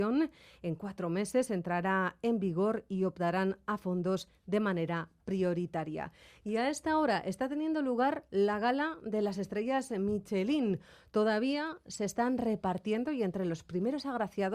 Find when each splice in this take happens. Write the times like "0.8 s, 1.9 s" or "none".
none